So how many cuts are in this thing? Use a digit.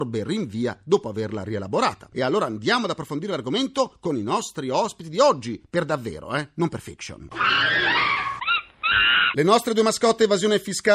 0